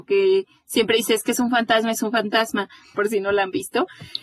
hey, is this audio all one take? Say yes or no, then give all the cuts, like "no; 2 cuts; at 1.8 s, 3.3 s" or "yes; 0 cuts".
no; 1 cut; at 2.9 s